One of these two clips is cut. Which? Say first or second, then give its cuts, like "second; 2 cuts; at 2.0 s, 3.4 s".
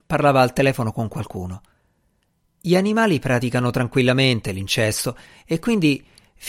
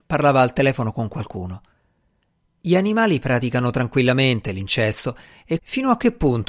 second; 1 cut; at 5.6 s